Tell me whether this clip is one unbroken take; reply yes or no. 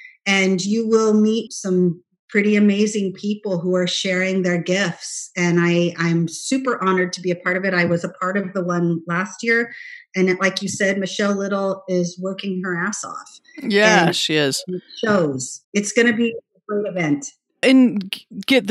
no